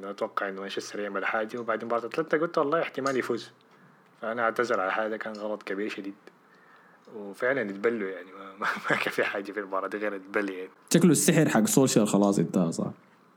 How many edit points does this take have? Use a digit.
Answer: 0